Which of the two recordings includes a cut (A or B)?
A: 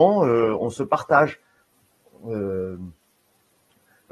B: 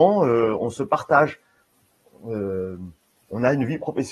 B